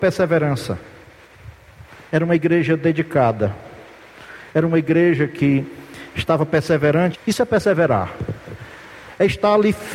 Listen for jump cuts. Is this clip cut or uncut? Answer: cut